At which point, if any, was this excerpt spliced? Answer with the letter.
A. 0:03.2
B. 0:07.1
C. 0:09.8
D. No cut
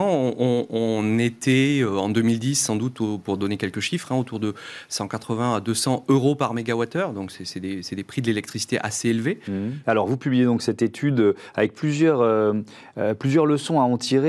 C